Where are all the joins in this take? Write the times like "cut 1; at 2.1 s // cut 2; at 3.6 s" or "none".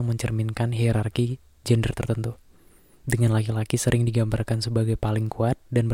none